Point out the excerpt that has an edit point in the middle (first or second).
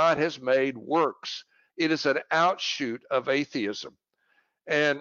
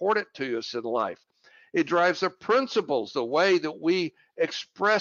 first